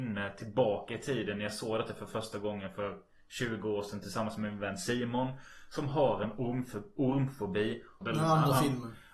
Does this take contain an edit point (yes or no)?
yes